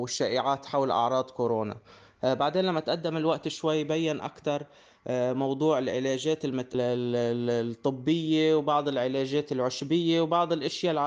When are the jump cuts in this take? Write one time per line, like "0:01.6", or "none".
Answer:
0:06.7